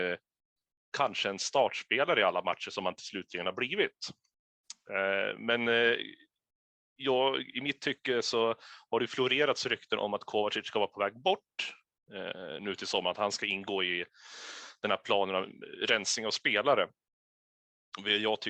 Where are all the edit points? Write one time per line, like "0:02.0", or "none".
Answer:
none